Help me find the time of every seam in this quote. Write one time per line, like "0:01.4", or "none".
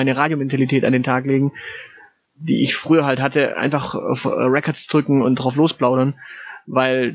none